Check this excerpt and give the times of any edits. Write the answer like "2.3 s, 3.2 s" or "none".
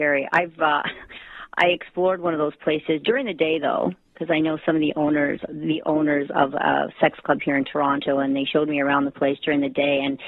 5.5 s